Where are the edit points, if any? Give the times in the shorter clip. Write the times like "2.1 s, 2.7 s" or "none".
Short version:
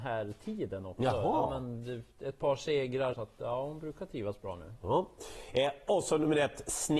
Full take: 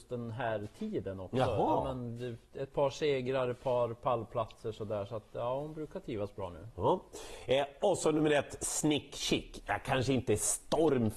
3.1 s